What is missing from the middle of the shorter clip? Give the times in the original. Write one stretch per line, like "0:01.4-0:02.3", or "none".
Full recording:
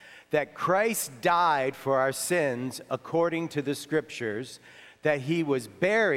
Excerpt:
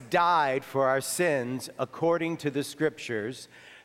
none